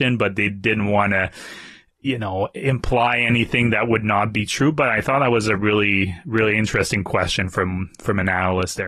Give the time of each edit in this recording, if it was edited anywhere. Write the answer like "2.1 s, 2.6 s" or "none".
none